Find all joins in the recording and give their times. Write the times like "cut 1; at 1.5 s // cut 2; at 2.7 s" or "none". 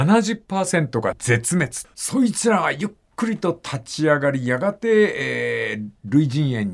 cut 1; at 1.9 s